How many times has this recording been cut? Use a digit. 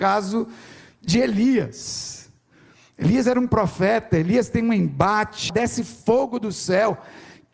1